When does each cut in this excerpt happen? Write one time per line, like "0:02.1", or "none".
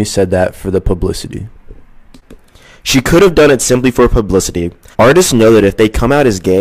0:04.9